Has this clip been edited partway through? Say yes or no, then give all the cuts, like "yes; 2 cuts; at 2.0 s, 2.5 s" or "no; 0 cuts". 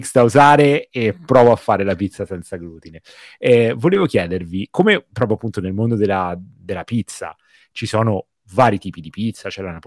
no; 0 cuts